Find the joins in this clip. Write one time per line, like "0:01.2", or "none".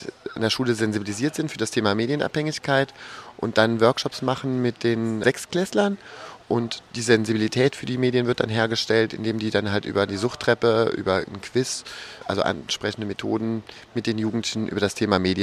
0:06.4